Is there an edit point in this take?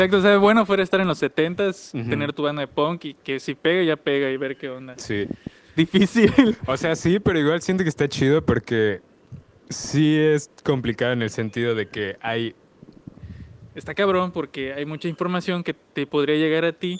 yes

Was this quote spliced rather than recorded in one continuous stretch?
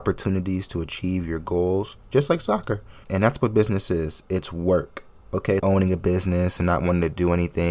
yes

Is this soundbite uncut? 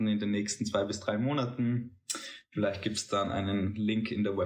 yes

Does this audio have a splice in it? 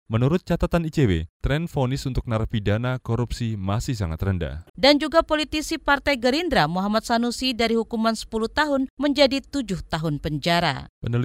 yes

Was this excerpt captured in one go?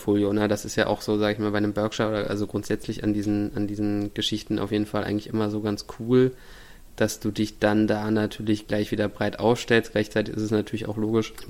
yes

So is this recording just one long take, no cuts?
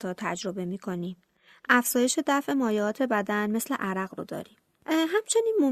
yes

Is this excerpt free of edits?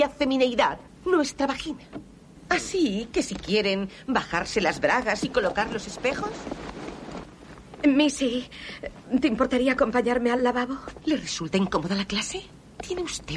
no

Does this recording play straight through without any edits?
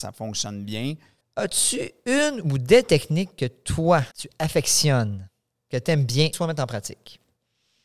no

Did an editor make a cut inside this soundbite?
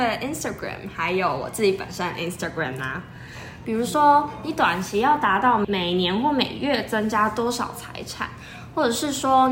yes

